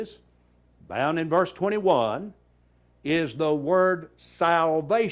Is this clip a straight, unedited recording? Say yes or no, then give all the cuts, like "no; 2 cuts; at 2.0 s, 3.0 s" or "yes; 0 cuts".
yes; 0 cuts